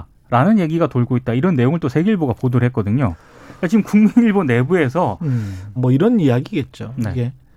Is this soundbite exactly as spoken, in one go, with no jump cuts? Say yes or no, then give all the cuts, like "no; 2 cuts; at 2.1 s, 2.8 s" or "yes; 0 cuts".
no; 1 cut; at 5.8 s